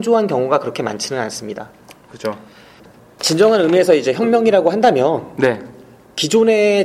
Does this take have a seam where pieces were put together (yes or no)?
no